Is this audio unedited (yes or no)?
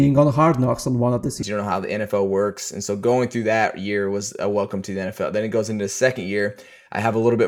no